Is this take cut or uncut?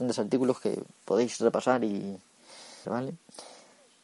cut